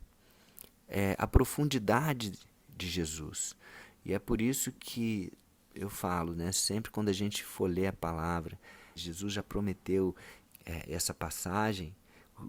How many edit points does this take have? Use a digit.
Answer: 2